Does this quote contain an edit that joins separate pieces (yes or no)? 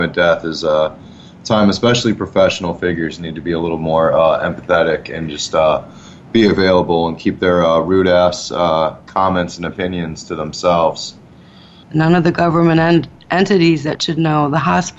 yes